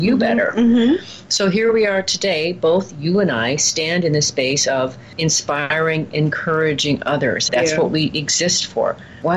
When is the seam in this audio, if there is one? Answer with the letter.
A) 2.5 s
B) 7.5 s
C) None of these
B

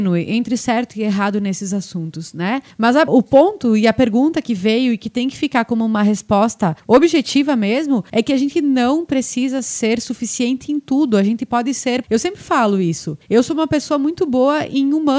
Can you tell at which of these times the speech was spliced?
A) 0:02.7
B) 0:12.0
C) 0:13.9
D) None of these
B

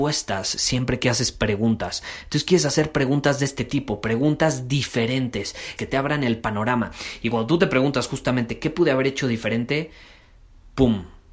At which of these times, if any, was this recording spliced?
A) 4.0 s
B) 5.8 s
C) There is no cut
B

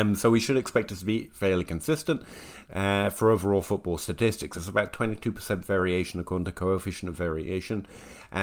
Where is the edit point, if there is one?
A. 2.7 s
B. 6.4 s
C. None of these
A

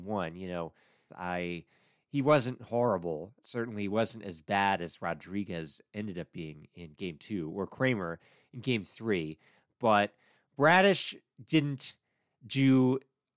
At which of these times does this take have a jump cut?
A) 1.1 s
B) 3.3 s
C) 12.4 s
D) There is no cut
A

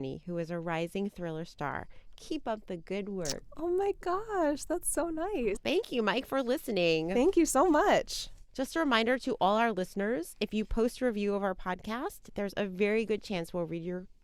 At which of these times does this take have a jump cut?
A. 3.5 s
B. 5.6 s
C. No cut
B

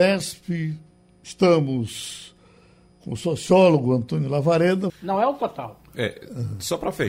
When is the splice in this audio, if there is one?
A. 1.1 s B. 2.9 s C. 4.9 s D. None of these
C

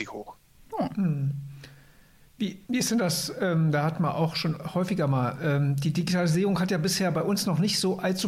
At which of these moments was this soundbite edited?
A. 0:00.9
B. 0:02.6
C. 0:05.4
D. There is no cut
B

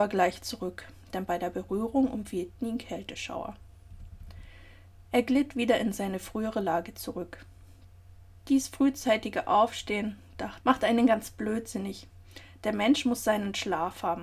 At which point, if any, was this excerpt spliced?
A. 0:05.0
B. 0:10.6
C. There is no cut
B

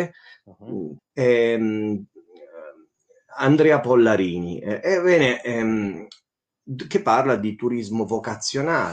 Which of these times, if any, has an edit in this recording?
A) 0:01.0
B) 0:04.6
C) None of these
A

